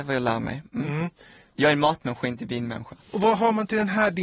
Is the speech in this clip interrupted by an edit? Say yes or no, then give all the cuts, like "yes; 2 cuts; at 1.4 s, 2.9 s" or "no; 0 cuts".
yes; 1 cut; at 3.0 s